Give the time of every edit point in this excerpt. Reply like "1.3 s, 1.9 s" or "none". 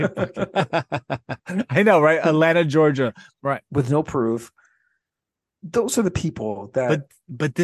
3.3 s